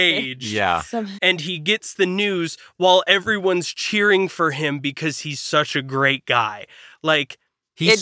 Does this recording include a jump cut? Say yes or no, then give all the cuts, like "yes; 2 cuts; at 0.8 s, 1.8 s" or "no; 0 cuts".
no; 0 cuts